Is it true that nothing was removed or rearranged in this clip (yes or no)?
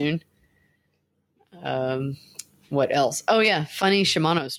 yes